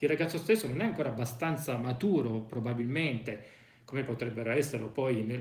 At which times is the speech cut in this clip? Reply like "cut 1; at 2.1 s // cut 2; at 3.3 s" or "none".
none